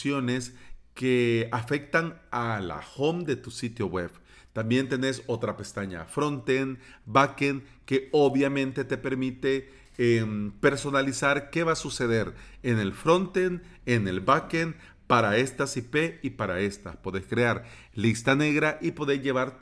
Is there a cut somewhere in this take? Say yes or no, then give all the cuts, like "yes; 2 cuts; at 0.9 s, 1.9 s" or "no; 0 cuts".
no; 0 cuts